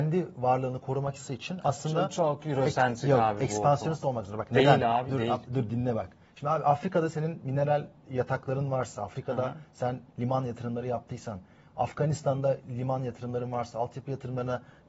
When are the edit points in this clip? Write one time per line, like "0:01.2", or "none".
none

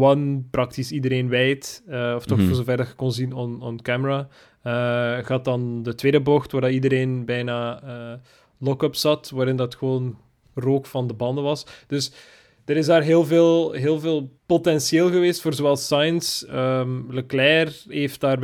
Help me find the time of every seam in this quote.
0:14.4

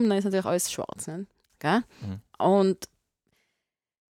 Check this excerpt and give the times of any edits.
0:01.5

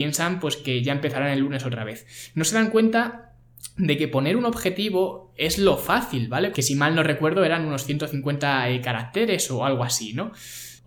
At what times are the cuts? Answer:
0:06.5

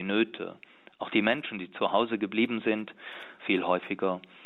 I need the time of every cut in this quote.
0:03.4

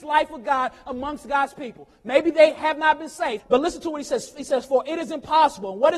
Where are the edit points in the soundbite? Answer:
0:03.4

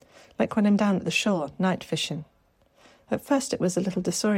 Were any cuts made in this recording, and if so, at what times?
none

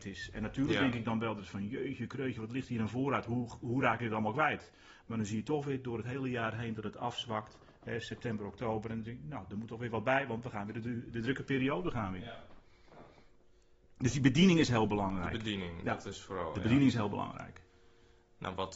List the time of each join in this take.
none

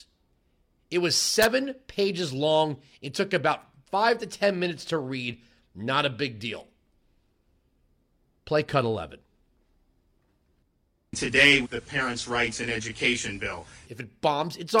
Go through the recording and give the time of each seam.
0:11.6
0:13.8

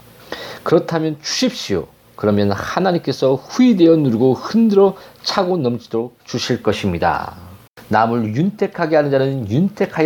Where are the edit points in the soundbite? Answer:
none

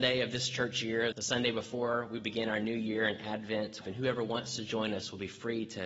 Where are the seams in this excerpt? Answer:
0:01.1
0:03.8

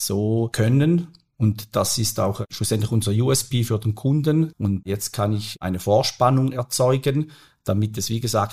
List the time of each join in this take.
0:04.5

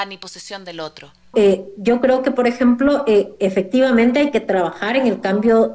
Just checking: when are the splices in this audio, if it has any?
0:01.3

